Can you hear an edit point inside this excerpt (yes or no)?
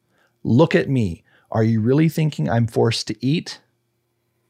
no